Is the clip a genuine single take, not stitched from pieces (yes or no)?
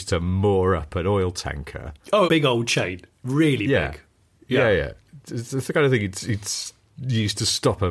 no